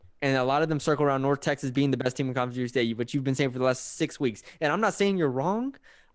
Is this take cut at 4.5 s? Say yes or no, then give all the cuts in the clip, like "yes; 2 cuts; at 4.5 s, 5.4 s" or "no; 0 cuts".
no; 0 cuts